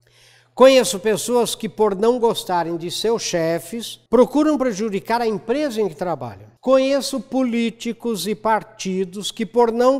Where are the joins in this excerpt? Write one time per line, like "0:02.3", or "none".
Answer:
0:04.1
0:06.6